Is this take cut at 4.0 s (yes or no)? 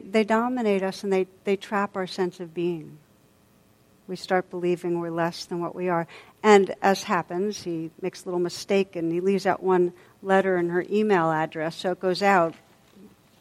no